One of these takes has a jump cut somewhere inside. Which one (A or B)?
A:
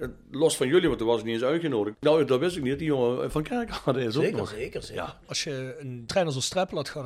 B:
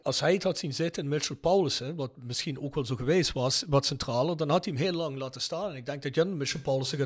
A